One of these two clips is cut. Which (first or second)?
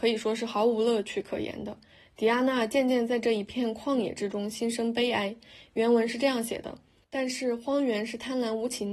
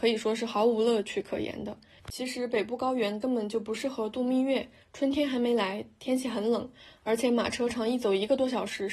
second